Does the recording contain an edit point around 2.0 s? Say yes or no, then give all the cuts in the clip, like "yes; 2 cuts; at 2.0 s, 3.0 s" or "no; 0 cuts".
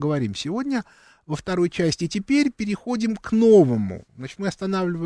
no; 0 cuts